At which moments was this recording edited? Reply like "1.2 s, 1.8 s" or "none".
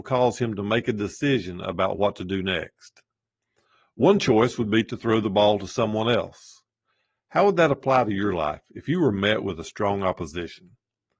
none

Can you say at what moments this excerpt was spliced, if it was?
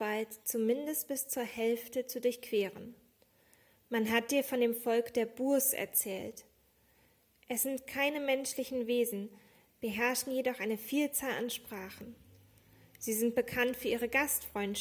none

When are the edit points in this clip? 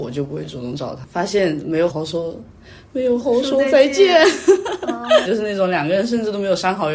1.9 s, 3.2 s, 5.2 s

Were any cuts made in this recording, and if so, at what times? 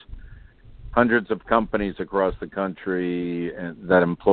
none

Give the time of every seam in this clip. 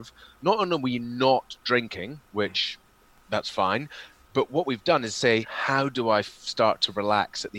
5.4 s

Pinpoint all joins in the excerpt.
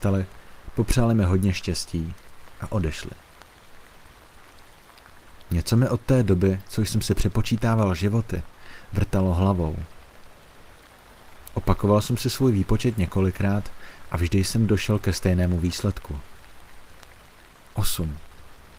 none

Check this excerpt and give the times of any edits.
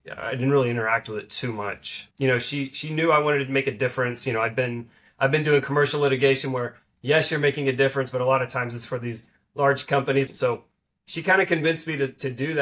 2.1 s, 10.3 s

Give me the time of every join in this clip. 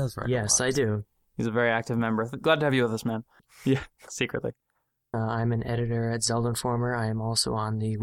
3.4 s, 5.1 s

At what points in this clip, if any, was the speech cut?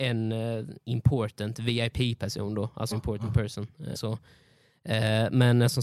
2.9 s, 3.9 s

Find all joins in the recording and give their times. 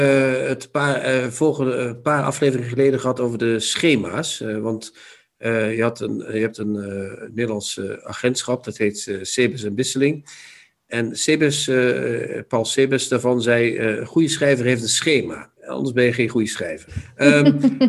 15.6 s, 16.9 s

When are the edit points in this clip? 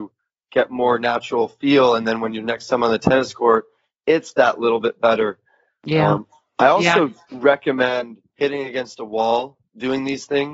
none

